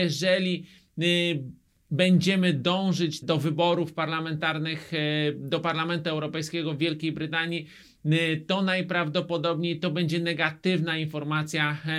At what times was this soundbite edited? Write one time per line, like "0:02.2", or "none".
0:03.2